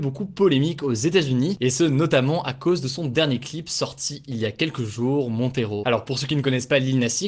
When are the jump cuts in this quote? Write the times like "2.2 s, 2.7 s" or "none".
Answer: 5.8 s